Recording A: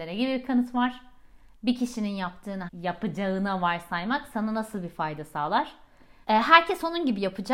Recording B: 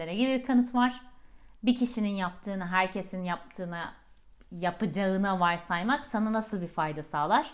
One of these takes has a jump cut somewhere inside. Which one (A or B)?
A